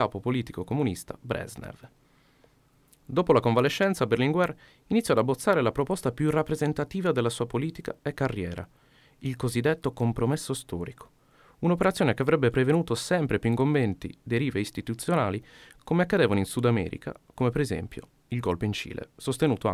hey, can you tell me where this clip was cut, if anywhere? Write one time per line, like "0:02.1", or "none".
none